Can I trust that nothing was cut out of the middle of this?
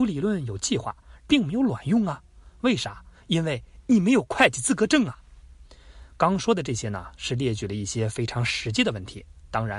no; 1 cut; at 1.2 s

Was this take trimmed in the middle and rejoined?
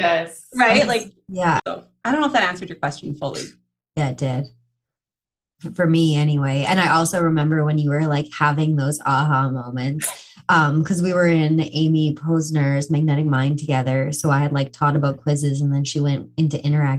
yes; 1 cut; at 1.6 s

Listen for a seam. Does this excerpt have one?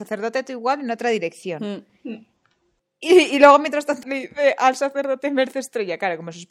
yes; 1 cut; at 4.0 s

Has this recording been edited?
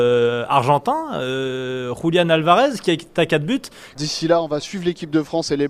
yes; 1 cut; at 3.9 s

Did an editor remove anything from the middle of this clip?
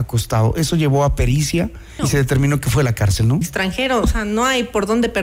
yes; 2 cuts; at 2.0 s, 3.4 s

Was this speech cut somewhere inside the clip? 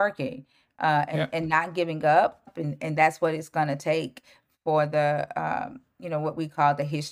yes; 1 cut; at 2.5 s

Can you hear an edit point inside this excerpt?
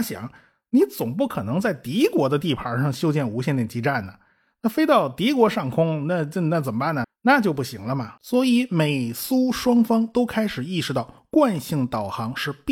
yes; 2 cuts; at 7.0 s, 8.2 s

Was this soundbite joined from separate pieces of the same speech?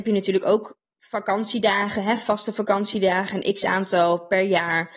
no; 0 cuts

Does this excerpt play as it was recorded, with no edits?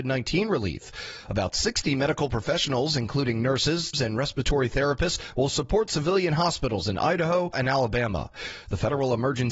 no; 2 cuts; at 3.9 s, 7.5 s

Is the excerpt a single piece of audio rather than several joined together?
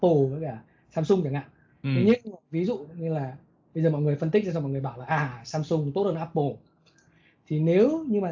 yes; 0 cuts

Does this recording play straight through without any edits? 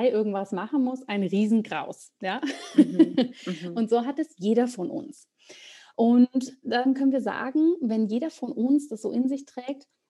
yes; 0 cuts

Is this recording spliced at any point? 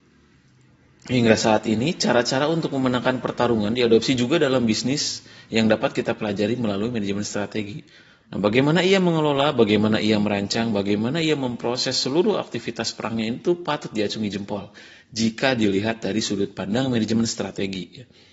yes; 1 cut; at 8.2 s

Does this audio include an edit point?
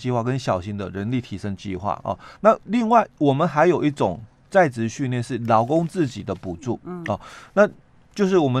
yes; 1 cut; at 2.4 s

